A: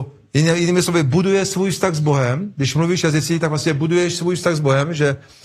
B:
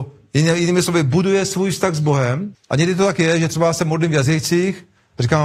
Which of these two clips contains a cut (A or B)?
B